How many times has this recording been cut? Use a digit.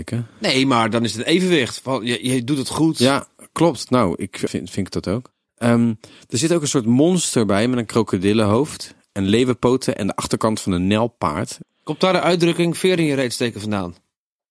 2